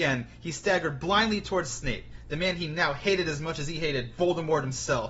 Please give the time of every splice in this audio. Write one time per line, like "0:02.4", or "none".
none